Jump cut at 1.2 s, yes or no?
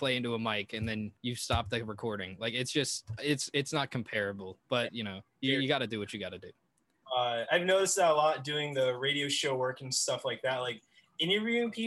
yes